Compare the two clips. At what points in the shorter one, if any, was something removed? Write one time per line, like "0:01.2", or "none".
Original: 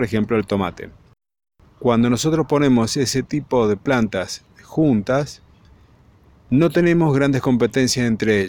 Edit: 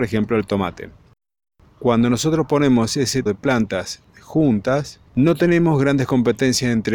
0:03.3
0:05.1